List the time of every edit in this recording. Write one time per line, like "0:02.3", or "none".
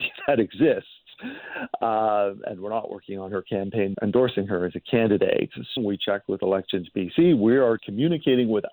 0:03.9
0:05.8
0:07.8